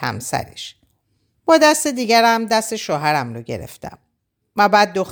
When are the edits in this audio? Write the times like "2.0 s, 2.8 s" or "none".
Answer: 1.3 s